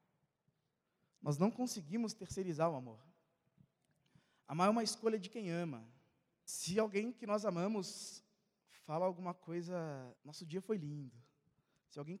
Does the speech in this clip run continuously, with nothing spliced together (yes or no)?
no